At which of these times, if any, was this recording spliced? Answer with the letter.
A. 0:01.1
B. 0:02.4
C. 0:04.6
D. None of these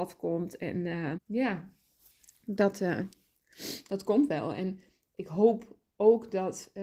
A